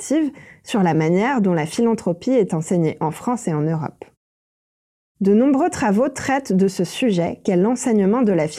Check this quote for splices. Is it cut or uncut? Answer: uncut